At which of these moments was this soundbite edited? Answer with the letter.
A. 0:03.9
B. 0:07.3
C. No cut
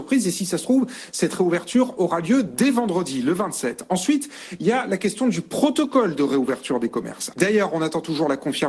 B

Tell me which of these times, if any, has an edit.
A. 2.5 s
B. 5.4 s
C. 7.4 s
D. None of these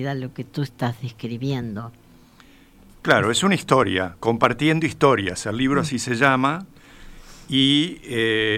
D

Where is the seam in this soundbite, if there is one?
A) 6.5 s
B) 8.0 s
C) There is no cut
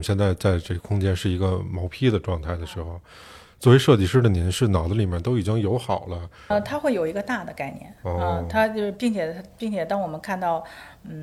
A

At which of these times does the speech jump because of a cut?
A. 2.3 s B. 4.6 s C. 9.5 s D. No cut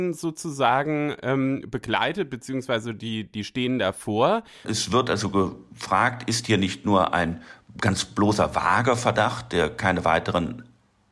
B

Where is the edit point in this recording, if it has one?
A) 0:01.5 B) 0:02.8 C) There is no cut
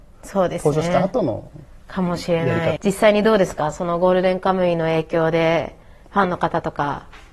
B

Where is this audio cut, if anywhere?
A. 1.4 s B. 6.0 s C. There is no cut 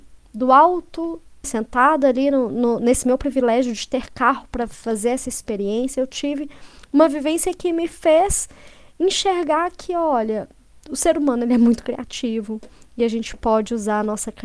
A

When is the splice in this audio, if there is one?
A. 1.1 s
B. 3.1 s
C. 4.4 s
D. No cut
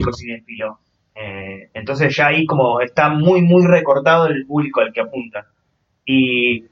D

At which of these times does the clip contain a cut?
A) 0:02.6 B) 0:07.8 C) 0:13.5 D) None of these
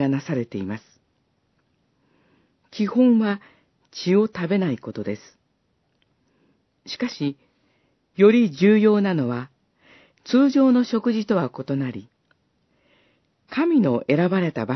C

